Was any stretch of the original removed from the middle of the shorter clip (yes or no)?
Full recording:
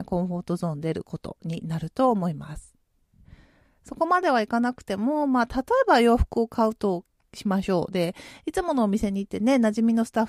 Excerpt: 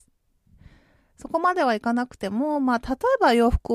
no